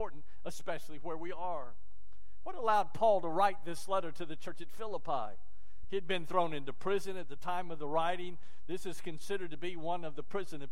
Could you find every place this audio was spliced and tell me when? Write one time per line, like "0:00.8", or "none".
none